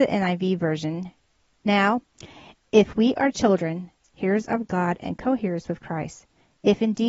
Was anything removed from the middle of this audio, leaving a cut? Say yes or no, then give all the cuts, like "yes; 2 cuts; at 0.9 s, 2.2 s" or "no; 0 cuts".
yes; 1 cut; at 4.1 s